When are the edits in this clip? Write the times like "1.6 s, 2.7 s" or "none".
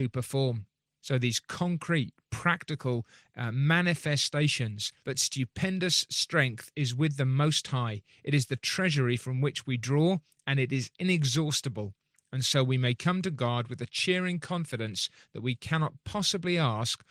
1.0 s, 5.0 s